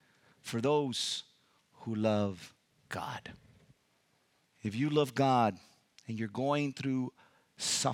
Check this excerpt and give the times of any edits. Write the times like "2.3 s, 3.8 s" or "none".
4.4 s